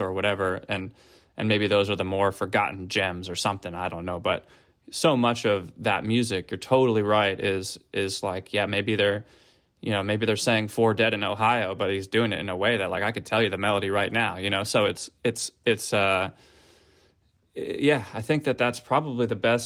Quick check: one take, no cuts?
yes; 0 cuts

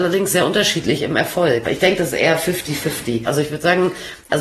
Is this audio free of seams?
no; 2 cuts; at 1.6 s, 3.3 s

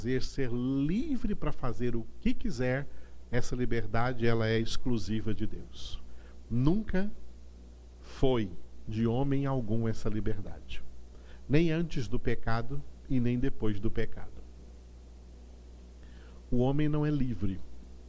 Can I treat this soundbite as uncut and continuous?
yes; 0 cuts

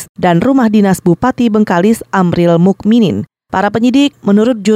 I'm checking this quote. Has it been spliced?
no; 0 cuts

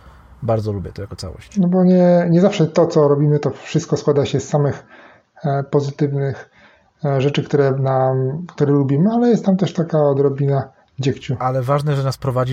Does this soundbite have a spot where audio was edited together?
no; 0 cuts

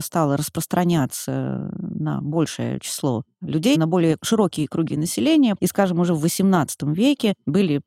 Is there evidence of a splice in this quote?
yes; 2 cuts; at 3.7 s, 5.6 s

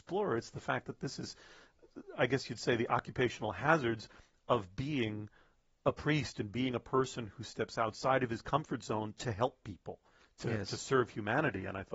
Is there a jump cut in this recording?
no; 0 cuts

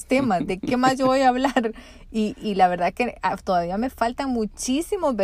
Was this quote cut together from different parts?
no; 0 cuts

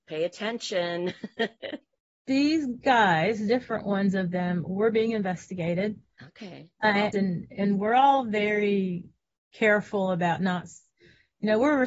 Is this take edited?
yes; 1 cut; at 7.1 s

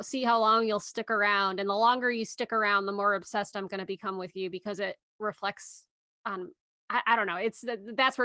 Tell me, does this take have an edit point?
no; 0 cuts

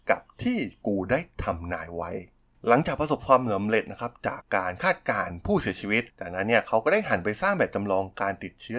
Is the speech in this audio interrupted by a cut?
yes; 1 cut; at 4.4 s

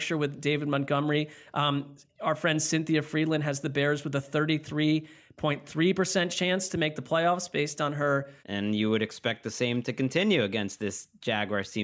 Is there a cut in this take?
yes; 1 cut; at 8.4 s

